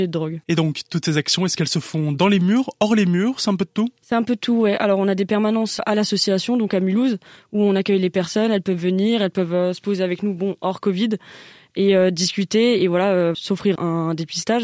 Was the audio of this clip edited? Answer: no; 0 cuts

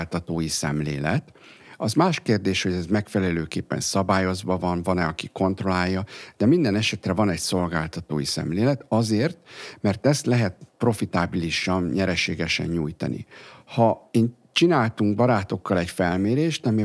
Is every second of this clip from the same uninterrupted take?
yes; 0 cuts

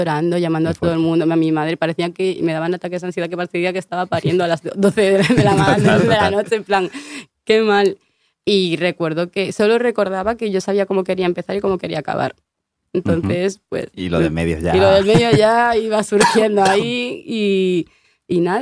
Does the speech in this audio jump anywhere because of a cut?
no; 0 cuts

